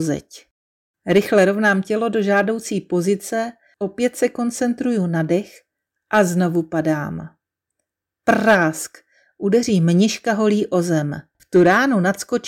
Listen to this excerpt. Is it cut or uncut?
cut